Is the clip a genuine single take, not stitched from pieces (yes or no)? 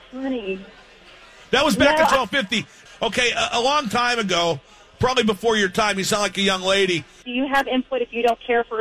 no